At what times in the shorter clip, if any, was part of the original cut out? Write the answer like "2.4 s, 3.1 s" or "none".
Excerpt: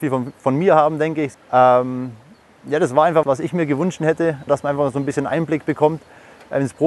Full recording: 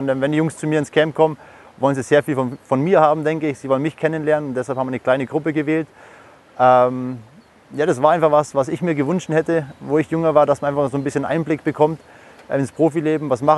1.3 s, 3.2 s, 4.5 s